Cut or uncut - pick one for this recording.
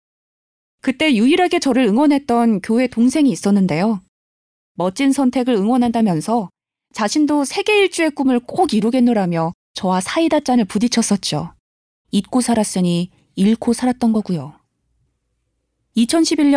cut